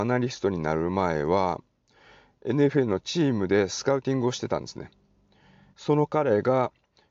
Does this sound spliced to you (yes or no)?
yes